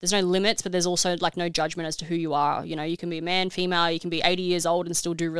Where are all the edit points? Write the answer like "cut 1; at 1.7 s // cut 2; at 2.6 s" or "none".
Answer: none